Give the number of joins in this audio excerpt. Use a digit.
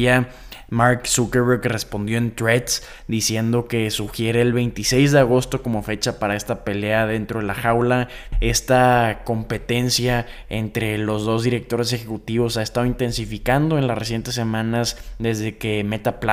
1